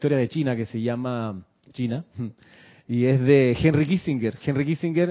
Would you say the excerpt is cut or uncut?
uncut